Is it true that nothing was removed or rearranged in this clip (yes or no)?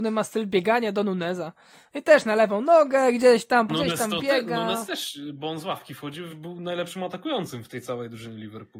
no